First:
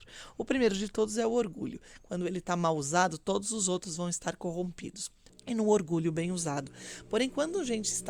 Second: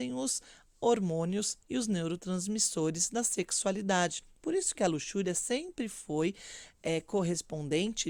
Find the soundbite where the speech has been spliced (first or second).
first